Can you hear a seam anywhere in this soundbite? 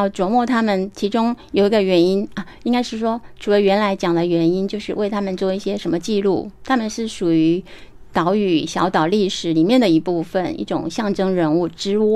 no; 0 cuts

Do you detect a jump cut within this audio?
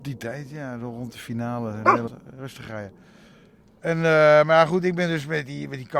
yes; 1 cut; at 2.1 s

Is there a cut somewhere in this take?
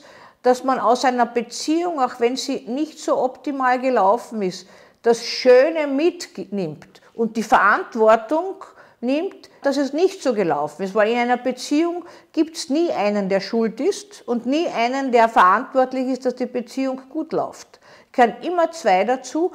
yes; 1 cut; at 9.6 s

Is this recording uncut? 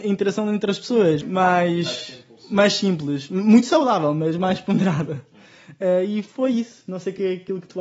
no; 1 cut; at 1.2 s

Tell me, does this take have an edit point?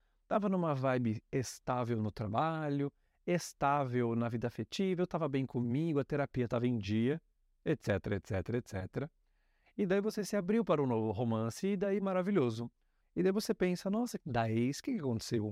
yes; 2 cuts; at 13.0 s, 14.2 s

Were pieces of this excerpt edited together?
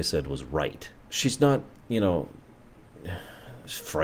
yes; 1 cut; at 1.0 s

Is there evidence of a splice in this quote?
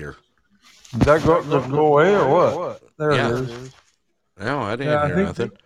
no; 0 cuts

